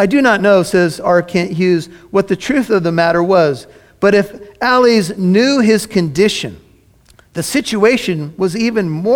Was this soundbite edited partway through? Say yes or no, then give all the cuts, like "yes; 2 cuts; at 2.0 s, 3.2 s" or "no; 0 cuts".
no; 0 cuts